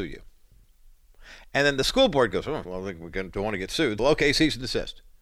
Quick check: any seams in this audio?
yes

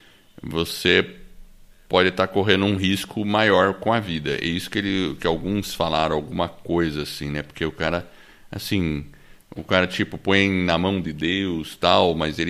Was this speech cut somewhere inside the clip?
no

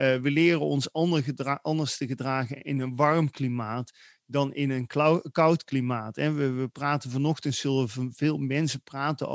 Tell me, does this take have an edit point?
no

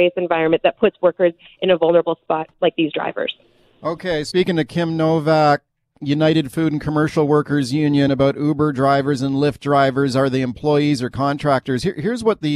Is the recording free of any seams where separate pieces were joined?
yes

